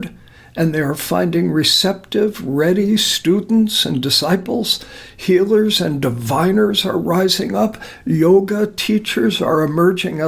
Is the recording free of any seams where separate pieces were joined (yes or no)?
yes